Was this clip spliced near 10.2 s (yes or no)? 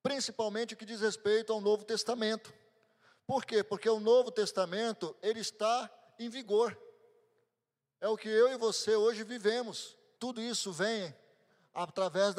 yes